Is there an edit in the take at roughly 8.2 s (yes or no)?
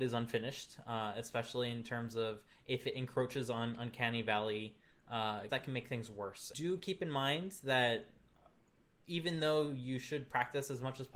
no